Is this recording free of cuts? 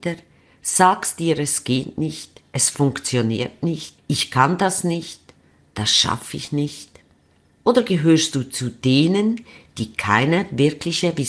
yes; 0 cuts

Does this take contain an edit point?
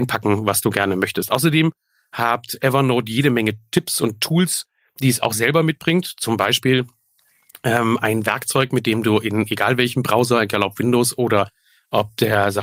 no; 0 cuts

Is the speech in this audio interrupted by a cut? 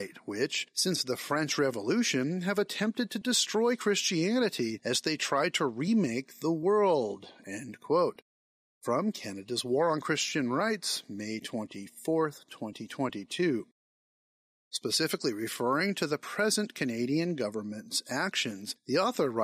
no; 0 cuts

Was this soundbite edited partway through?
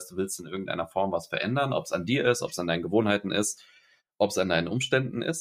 no; 0 cuts

